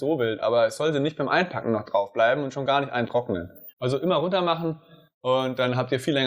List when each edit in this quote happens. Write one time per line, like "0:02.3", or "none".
0:03.7